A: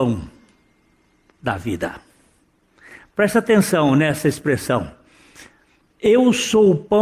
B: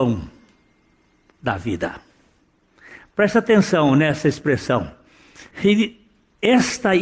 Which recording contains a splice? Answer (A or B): B